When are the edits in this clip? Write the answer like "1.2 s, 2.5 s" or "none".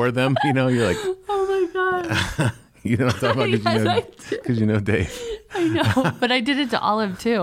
none